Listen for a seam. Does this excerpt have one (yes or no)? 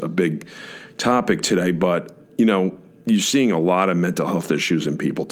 no